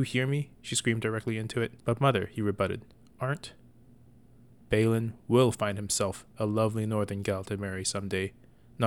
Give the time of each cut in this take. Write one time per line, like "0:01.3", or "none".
0:01.8
0:04.6

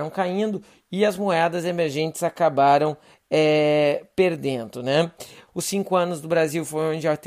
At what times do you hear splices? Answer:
0:05.5

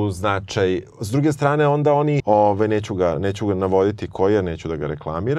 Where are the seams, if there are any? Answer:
0:02.2

